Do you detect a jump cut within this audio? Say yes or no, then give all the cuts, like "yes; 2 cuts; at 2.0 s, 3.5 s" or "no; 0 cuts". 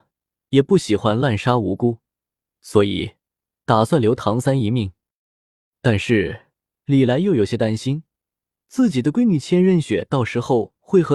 no; 0 cuts